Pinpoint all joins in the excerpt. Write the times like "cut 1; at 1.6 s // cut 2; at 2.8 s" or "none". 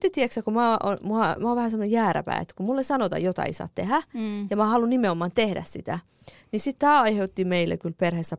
none